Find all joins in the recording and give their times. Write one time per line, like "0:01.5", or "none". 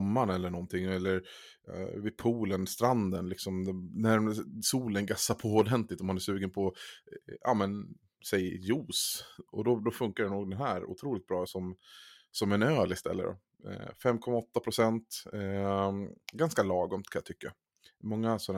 0:11.5